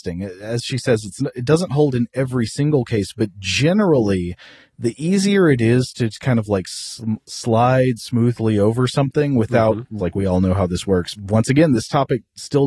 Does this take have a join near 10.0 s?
yes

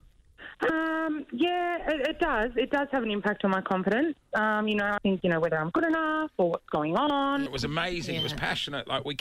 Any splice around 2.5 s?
no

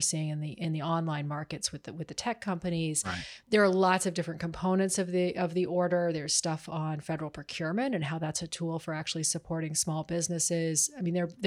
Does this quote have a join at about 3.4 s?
yes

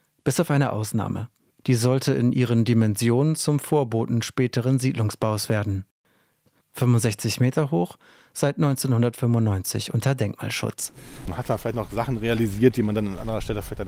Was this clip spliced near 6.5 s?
yes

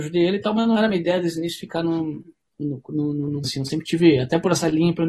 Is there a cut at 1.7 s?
no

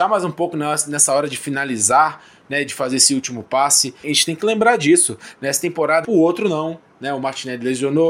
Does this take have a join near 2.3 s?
no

